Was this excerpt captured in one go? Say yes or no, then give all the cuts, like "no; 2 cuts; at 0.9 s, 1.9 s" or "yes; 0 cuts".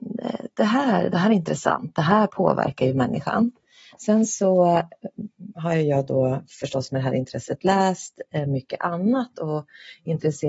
no; 2 cuts; at 1.1 s, 3.9 s